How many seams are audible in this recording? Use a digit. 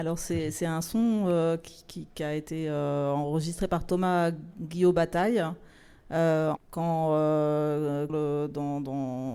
2